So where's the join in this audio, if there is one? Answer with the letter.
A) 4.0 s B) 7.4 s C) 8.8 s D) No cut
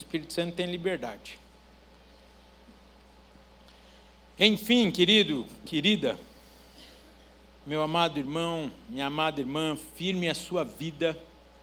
D